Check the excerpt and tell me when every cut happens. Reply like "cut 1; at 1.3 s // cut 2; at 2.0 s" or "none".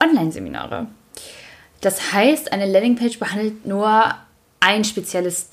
none